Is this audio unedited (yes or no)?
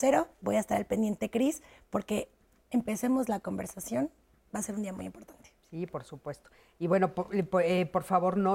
yes